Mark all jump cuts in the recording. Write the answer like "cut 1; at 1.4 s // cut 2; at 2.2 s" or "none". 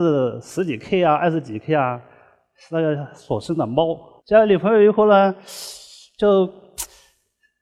cut 1; at 4.2 s

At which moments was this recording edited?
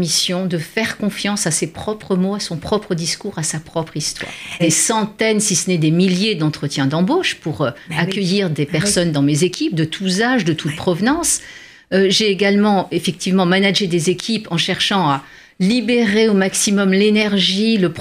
cut 1; at 4.6 s

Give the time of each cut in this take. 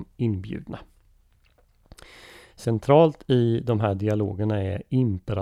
none

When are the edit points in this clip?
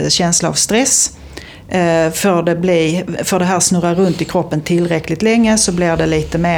none

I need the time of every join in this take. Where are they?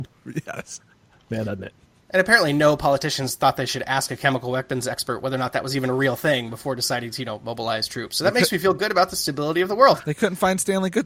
cut 1; at 1.4 s

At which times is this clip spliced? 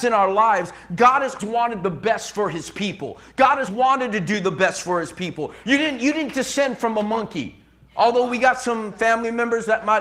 cut 1; at 1.4 s // cut 2; at 3.7 s // cut 3; at 5.6 s

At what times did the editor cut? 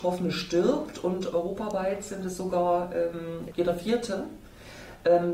cut 1; at 3.5 s

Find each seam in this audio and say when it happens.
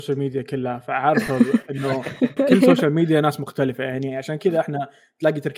cut 1; at 2.4 s

